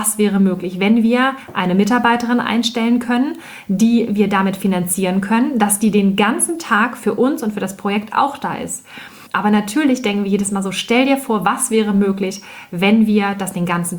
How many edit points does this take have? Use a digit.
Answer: 1